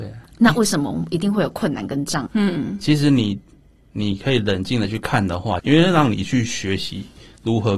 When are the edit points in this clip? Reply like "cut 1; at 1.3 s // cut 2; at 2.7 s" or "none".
cut 1; at 2.3 s // cut 2; at 5.6 s